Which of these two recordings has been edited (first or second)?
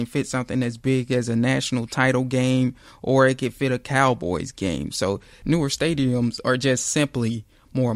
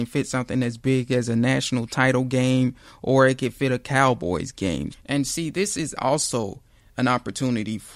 second